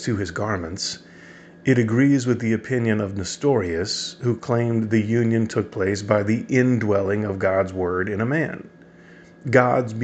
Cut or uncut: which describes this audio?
uncut